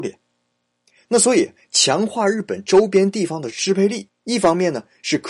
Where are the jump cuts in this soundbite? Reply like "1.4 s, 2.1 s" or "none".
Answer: 4.1 s